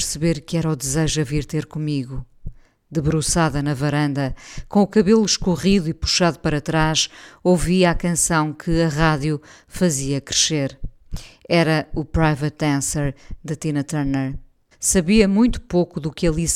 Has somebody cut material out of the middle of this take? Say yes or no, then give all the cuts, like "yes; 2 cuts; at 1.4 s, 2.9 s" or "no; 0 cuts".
yes; 1 cut; at 14.7 s